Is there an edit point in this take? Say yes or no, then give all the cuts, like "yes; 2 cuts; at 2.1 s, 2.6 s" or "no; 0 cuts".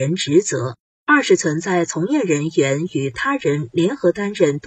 no; 0 cuts